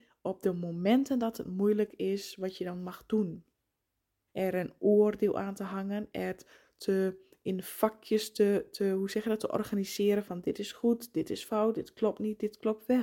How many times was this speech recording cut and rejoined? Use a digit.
2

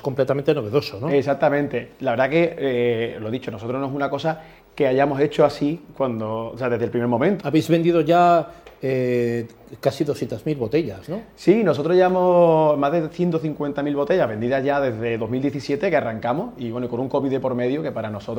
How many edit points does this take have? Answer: 1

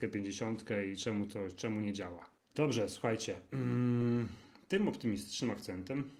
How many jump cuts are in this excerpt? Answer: 1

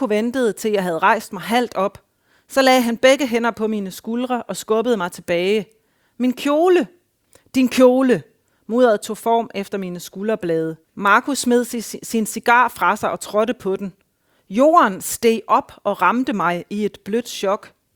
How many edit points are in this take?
1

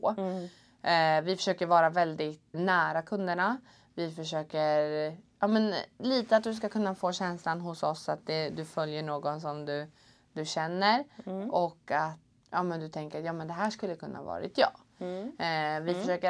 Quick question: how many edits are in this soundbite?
2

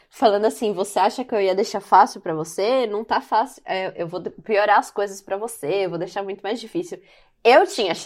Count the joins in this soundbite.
0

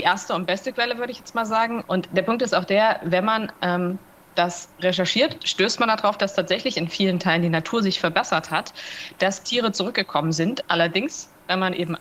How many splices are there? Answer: 2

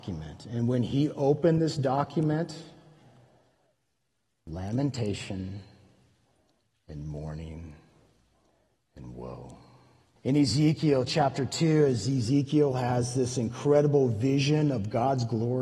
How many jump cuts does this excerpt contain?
1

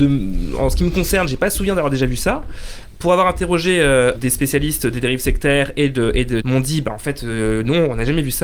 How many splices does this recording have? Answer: 2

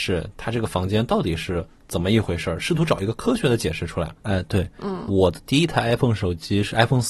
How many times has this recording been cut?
1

